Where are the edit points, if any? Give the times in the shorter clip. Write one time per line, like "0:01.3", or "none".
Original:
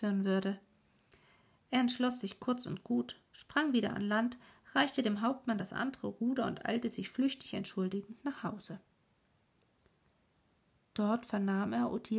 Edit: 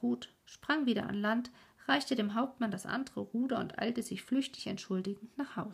none